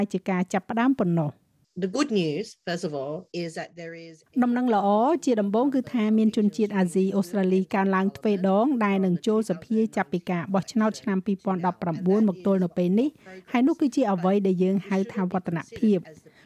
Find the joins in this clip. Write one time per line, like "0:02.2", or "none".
0:03.3